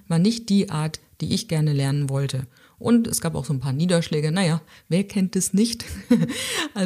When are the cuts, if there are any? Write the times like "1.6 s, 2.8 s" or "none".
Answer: none